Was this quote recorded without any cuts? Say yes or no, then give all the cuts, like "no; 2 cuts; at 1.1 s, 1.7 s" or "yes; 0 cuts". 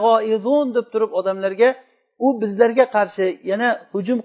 yes; 0 cuts